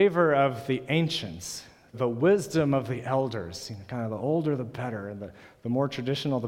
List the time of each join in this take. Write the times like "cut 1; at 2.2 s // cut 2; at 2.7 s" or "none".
cut 1; at 1.9 s